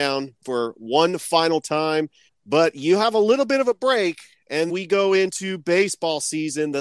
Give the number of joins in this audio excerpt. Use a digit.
2